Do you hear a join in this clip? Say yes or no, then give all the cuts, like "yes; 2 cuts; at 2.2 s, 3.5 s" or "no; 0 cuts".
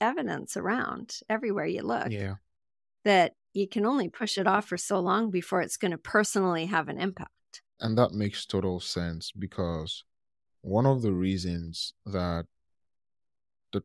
yes; 1 cut; at 7.8 s